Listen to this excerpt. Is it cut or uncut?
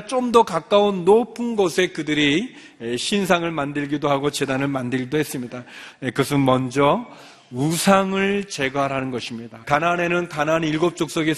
cut